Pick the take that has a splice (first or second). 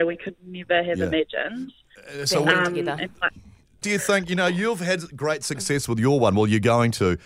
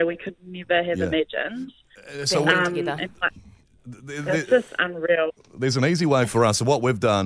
first